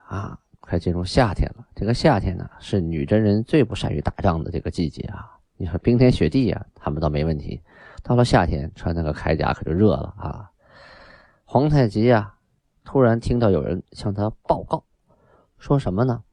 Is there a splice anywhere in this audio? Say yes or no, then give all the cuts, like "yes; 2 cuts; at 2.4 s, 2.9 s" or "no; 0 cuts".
no; 0 cuts